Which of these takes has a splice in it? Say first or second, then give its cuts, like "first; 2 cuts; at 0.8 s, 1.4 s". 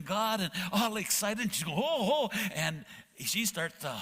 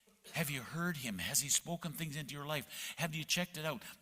first; 1 cut; at 2.5 s